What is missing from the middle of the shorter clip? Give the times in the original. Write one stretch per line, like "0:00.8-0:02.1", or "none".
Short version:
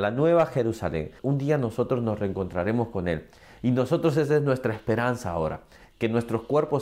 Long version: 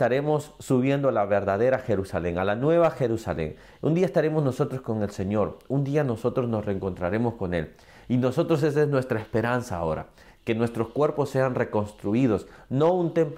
0:03.6-0:05.6